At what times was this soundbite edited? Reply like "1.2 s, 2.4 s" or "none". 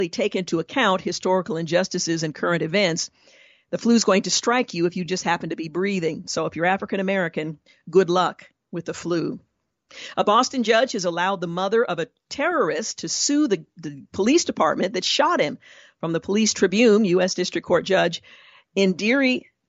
none